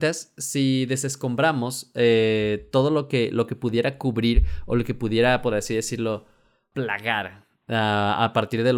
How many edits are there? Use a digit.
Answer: 1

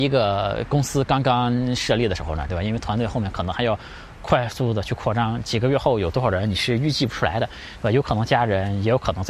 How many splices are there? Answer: 1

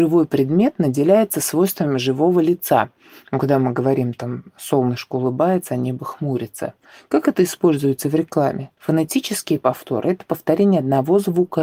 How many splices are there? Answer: 1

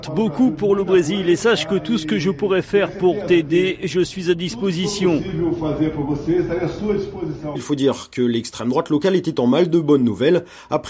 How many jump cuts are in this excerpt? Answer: 1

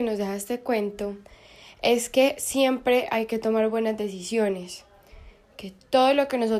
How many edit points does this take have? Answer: 0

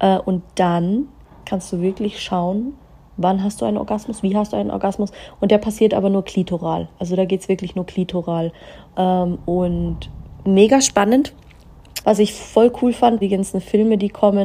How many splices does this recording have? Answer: 2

